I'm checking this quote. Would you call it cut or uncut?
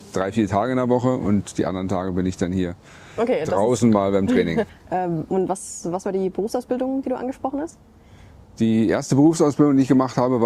cut